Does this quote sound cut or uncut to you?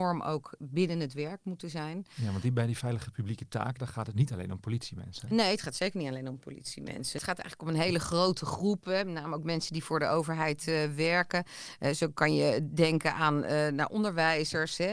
uncut